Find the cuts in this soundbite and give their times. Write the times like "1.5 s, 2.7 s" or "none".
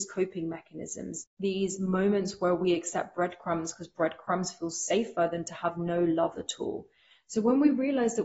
none